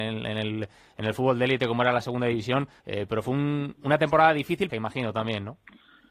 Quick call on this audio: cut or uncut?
cut